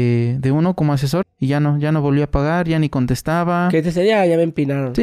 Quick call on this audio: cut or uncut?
cut